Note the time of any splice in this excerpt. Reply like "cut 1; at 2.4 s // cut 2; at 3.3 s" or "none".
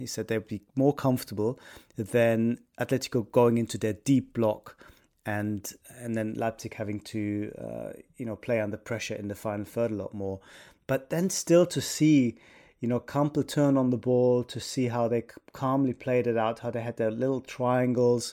none

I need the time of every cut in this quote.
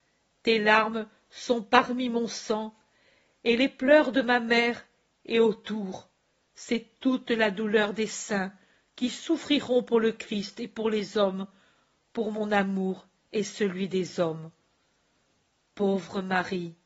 none

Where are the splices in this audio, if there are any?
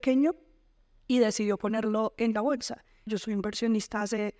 cut 1; at 3.1 s

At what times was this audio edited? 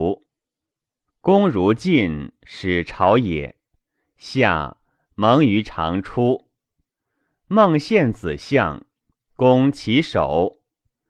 none

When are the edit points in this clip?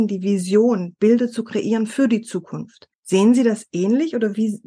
cut 1; at 2.9 s

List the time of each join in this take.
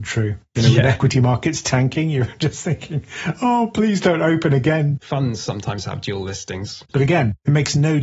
cut 1; at 5.0 s // cut 2; at 6.9 s

